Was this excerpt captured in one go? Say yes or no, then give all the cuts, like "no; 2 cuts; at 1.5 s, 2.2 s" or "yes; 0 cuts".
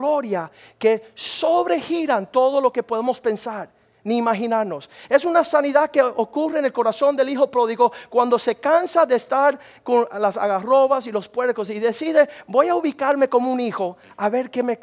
yes; 0 cuts